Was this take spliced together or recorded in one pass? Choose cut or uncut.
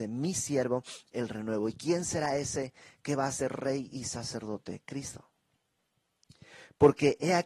uncut